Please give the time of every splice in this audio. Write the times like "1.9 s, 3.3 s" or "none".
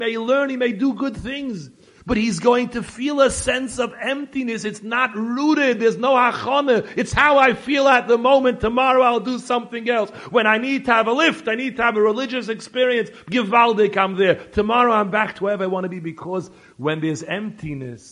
none